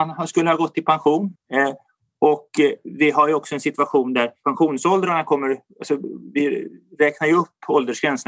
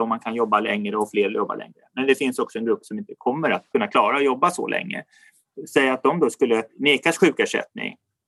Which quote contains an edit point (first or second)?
first